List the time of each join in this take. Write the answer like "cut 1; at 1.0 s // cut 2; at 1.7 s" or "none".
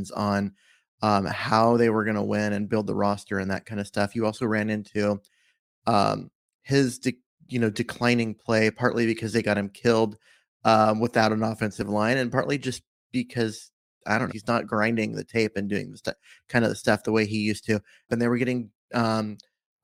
cut 1; at 14.3 s // cut 2; at 18.1 s